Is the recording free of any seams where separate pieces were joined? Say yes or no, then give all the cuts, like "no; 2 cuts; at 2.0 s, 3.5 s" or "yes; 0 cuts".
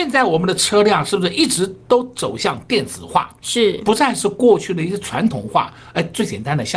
yes; 0 cuts